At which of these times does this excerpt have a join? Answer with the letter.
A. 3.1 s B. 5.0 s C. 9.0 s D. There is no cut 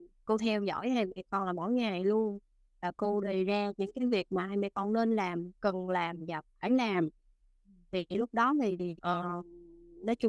C